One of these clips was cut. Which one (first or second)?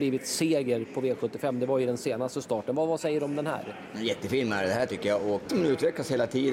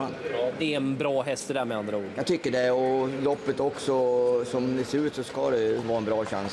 first